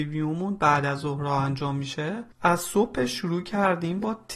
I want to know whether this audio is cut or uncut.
cut